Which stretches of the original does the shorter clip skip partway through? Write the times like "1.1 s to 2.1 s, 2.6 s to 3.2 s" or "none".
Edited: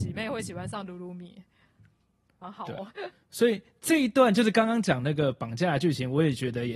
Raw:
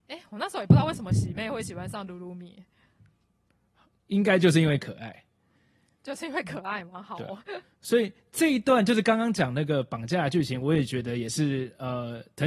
3.6 s to 6.9 s